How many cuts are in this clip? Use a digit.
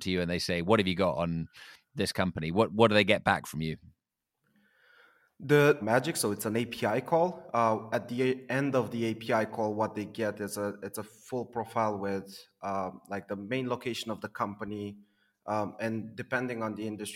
1